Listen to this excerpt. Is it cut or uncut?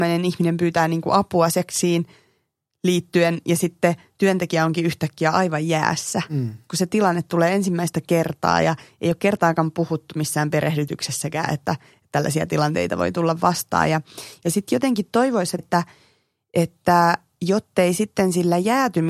cut